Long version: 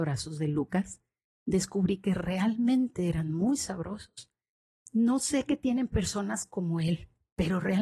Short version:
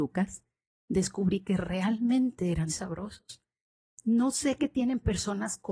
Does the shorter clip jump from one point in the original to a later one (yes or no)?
yes